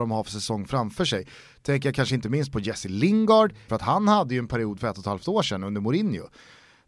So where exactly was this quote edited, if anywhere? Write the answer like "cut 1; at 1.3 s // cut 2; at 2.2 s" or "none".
cut 1; at 3.7 s